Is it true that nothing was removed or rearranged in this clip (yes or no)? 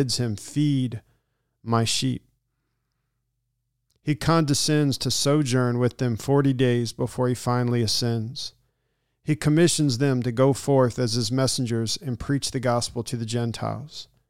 yes